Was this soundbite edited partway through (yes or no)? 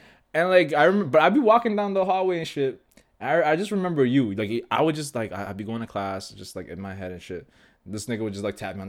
no